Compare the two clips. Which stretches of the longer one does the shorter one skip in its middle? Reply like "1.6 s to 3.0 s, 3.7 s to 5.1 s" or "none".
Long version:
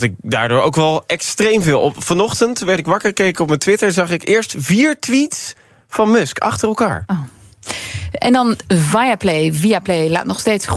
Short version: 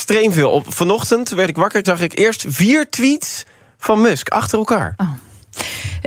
3.1 s to 3.9 s

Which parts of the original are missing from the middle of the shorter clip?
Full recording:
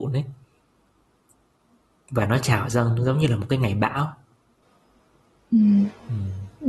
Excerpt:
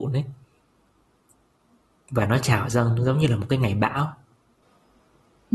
none

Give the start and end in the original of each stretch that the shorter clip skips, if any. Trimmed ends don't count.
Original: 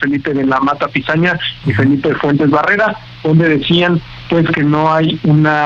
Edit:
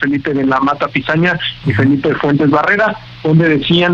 none

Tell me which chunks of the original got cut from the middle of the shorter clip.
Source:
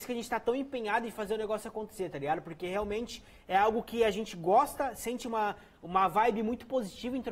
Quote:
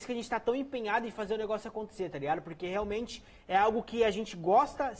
none

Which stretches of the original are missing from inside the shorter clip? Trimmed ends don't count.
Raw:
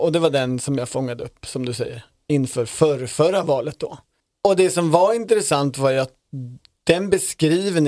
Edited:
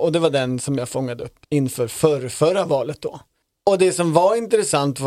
1.4 s to 2.2 s

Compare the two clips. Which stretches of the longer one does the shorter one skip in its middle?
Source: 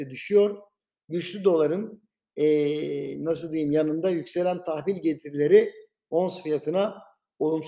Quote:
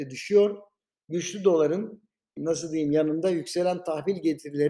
2.4 s to 3.2 s

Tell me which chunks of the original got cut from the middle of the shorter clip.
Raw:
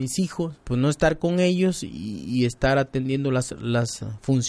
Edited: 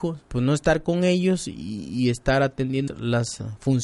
3.2 s to 3.5 s

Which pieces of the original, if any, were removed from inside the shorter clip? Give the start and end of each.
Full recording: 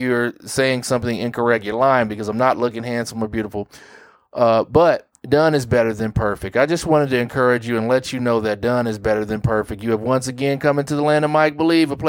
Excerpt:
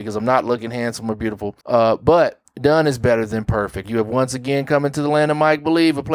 3.7 s to 4.3 s, 6.5 s to 9.8 s

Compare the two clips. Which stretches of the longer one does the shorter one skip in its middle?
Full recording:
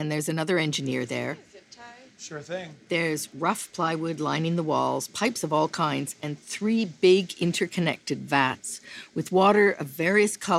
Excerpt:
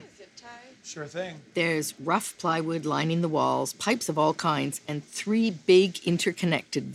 none

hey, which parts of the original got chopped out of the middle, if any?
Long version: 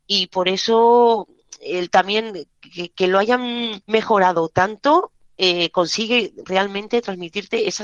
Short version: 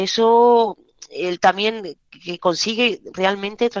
2.9 s to 5.7 s

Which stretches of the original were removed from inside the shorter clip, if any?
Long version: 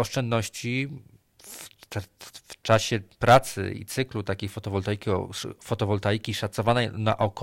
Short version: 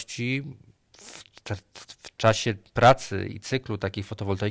none

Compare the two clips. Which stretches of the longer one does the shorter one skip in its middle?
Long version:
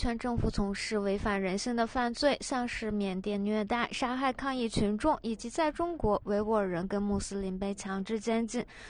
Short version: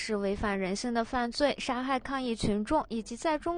2.4 s to 3.9 s

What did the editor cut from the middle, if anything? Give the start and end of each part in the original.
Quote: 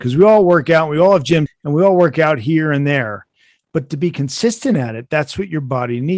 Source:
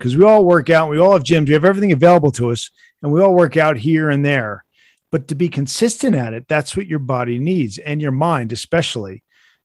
1.5 s to 2.8 s

